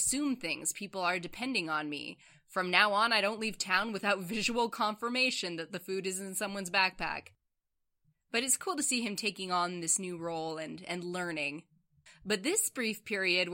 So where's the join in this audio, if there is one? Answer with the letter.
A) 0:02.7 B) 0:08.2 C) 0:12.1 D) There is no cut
C